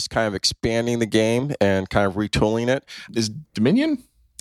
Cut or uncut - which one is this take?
cut